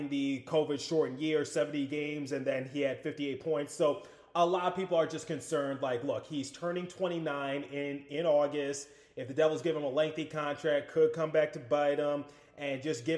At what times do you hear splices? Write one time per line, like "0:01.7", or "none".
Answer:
none